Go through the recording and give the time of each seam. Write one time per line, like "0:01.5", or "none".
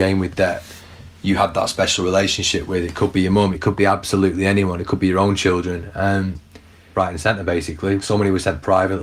0:03.5
0:06.9
0:08.0